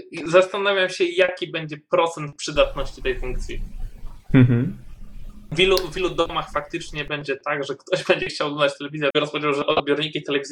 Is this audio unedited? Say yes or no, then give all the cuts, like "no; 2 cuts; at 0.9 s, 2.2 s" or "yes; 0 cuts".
no; 1 cut; at 9.1 s